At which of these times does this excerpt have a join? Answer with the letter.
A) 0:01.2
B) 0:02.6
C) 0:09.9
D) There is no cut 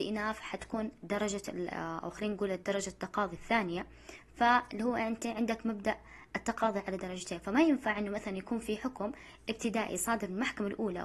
B